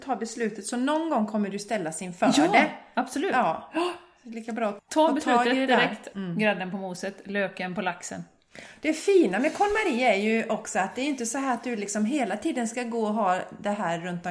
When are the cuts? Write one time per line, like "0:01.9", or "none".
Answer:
0:04.8
0:06.1